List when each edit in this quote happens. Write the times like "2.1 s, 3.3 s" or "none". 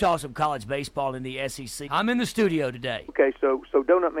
1.9 s, 3.1 s